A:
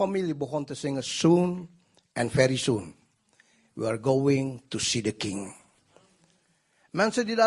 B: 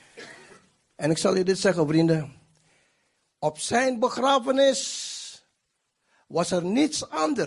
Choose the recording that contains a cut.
B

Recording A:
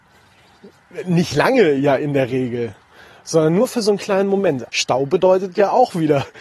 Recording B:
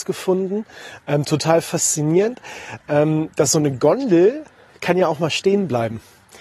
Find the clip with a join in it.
A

